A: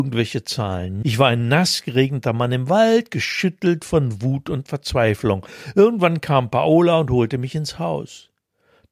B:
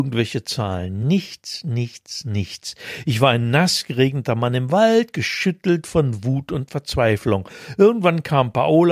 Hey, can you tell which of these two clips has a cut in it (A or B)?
A